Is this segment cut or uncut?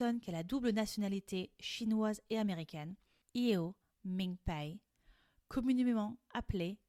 uncut